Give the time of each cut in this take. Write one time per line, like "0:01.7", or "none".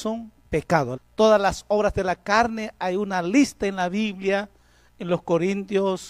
0:01.0

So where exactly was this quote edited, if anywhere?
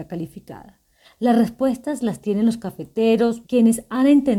0:01.0
0:03.4

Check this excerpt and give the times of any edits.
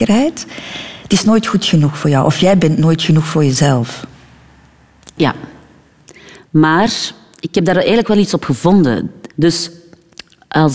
0:05.2
0:09.3

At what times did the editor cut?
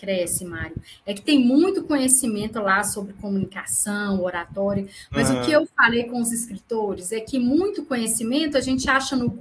none

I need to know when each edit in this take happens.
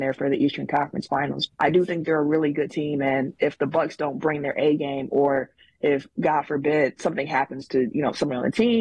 0:01.5

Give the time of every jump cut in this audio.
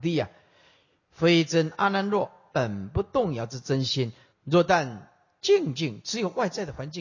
0:02.5
0:04.3

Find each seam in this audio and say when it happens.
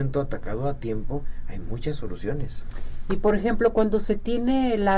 none

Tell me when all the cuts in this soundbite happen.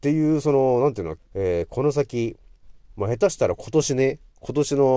0:01.2

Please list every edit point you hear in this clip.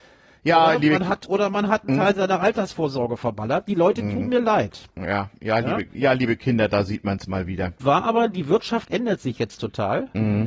0:07.8

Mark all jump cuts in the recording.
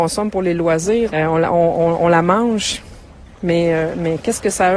0:01.1

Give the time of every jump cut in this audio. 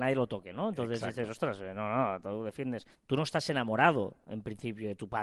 0:02.9

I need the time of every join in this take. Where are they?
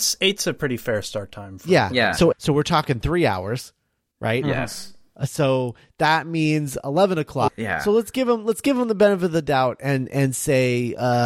0:02.3
0:07.5

